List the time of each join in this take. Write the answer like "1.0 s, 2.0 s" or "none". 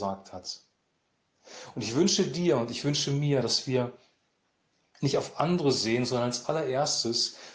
none